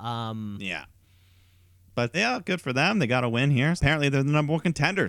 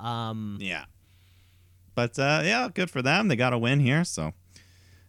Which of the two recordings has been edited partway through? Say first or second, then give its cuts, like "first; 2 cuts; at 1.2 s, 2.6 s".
first; 2 cuts; at 2.1 s, 3.8 s